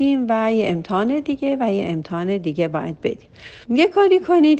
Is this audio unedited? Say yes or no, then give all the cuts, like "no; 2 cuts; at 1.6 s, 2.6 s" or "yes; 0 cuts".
no; 1 cut; at 3.6 s